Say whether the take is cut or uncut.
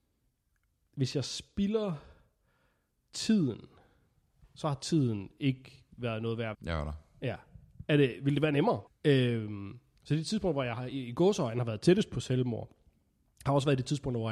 cut